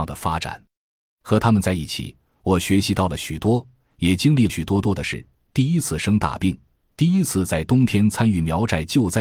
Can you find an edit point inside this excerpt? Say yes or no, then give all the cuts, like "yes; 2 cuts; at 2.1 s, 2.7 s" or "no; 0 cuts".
yes; 1 cut; at 4.5 s